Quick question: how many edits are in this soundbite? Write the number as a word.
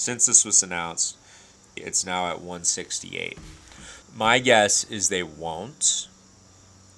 two